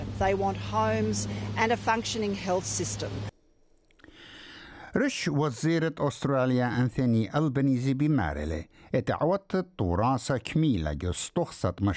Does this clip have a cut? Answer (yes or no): no